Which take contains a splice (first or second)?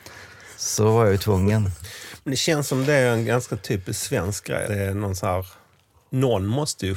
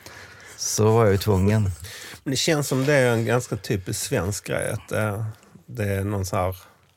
first